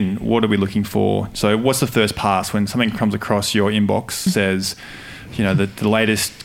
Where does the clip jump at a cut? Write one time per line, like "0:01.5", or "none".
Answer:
0:04.3

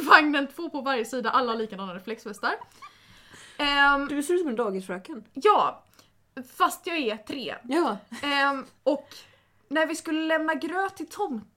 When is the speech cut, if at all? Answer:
none

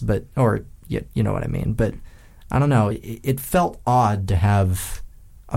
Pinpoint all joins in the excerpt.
none

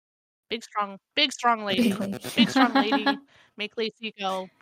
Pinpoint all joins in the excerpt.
none

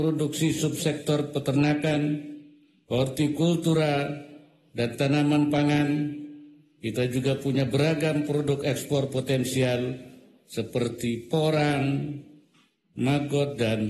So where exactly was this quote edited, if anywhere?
none

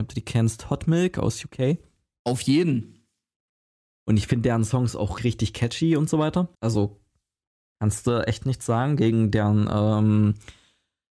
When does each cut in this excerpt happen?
0:05.2
0:06.5

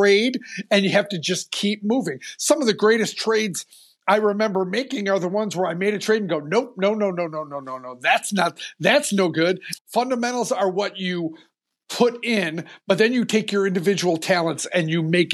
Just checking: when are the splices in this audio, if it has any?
0:09.7

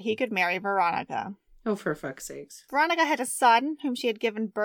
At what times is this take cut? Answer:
none

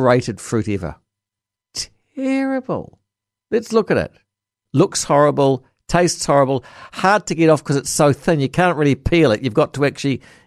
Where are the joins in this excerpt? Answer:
0:04.7

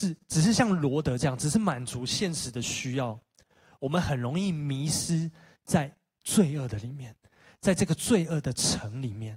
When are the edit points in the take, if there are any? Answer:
none

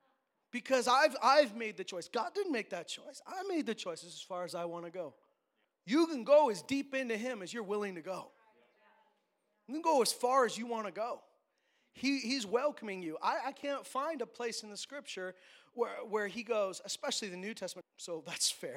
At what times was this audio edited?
0:05.6
0:17.8

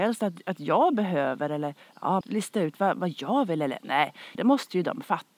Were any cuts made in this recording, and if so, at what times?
0:02.2
0:04.4

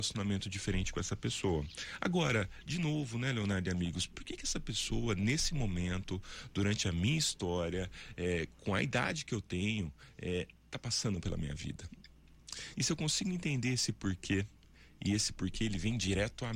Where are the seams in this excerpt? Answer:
0:12.7

